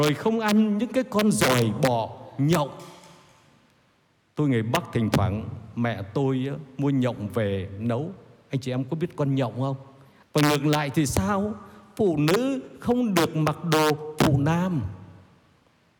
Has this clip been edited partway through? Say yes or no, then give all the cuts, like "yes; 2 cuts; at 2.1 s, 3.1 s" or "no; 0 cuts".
yes; 1 cut; at 10.2 s